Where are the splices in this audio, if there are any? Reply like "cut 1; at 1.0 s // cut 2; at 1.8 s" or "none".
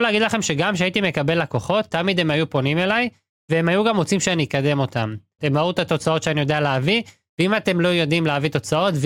cut 1; at 5.4 s

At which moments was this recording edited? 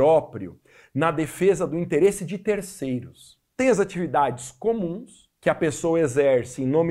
cut 1; at 3.5 s // cut 2; at 5.4 s

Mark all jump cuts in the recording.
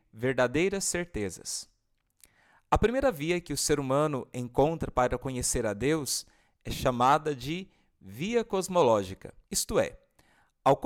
cut 1; at 9.4 s

